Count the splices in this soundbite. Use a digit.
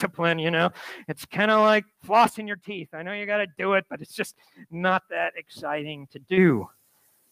0